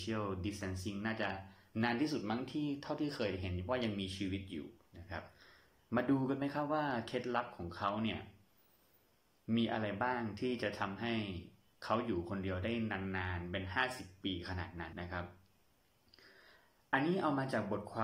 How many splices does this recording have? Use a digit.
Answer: 1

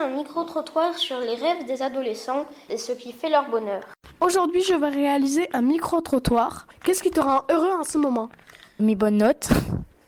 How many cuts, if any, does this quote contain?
1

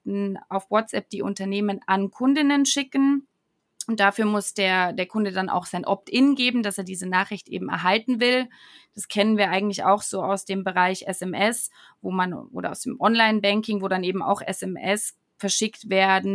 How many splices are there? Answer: 0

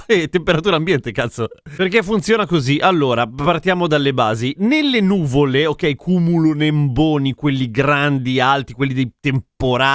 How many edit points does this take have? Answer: 1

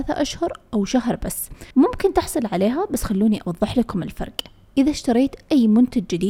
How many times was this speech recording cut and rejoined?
1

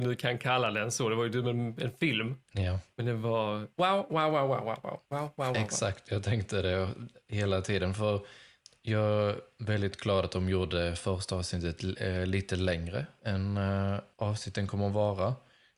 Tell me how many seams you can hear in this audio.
0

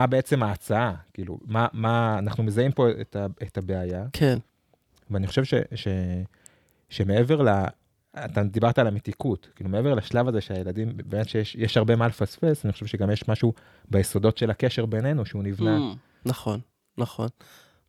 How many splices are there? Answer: 0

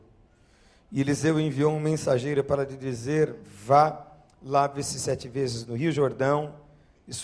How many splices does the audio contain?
0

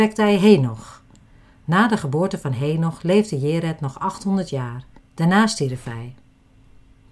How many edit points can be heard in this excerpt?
1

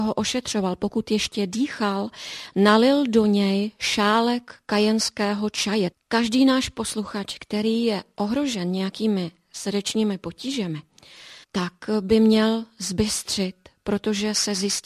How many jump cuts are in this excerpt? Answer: 2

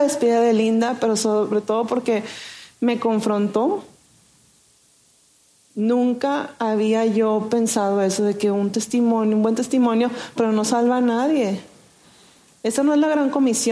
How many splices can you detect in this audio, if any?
1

